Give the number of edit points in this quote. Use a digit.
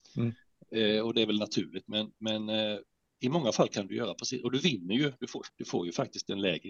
1